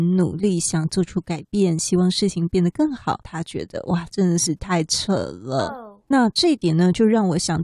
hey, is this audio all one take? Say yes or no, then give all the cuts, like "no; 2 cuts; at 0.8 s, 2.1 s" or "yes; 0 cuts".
no; 1 cut; at 3.2 s